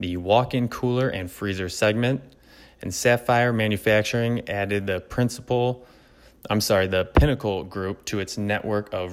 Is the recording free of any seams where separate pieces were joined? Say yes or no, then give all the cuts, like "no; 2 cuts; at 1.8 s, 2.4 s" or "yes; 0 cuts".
yes; 0 cuts